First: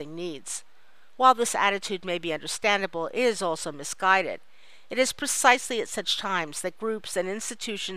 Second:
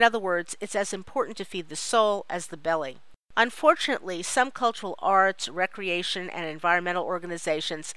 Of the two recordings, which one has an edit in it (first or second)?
second